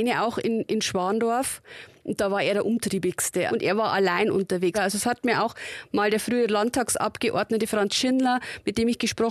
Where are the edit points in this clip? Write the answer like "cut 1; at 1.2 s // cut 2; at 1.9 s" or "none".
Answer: cut 1; at 3.5 s // cut 2; at 4.7 s